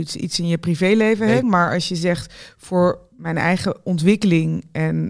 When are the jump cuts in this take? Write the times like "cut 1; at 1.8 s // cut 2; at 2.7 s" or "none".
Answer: cut 1; at 1.4 s